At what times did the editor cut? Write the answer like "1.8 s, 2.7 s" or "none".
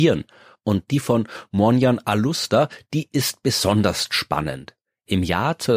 none